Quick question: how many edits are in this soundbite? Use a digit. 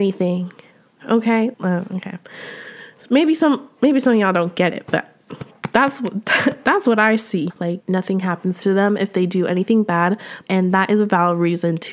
3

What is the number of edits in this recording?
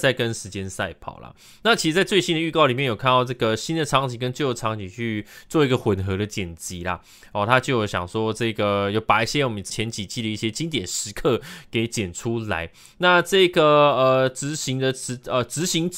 1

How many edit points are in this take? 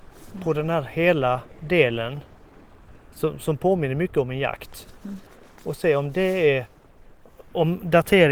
0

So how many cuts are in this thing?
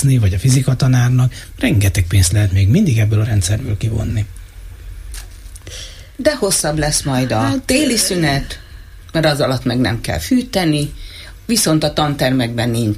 0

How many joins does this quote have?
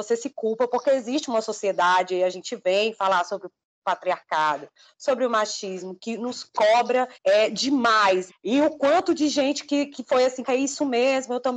3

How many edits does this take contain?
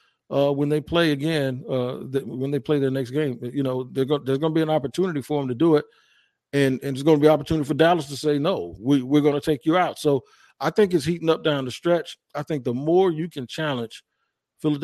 0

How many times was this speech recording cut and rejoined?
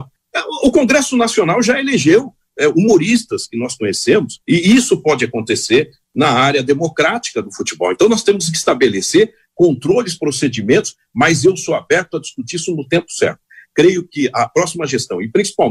1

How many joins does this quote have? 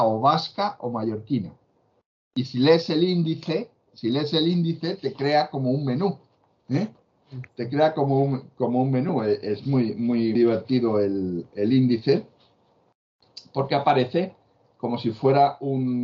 1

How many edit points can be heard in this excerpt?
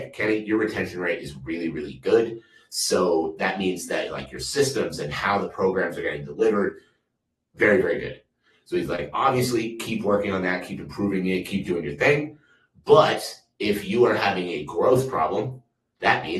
0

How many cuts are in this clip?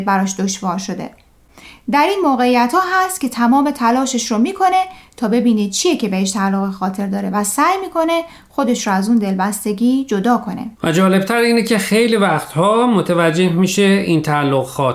1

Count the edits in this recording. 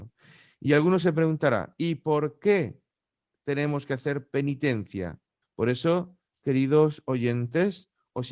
1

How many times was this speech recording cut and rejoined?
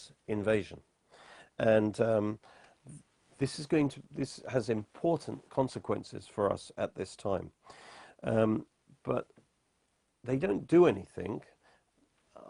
1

